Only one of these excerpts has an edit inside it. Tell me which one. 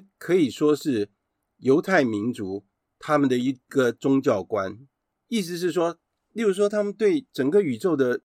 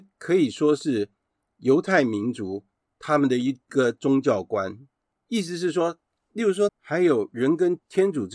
second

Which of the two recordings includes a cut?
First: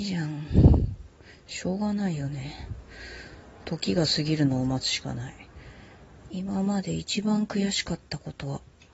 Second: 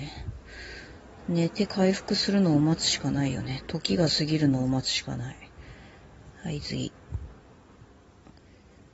first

